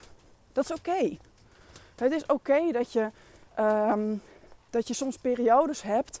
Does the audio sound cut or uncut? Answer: uncut